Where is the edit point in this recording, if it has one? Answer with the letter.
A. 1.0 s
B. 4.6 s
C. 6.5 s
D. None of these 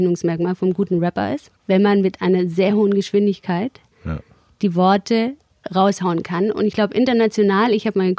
D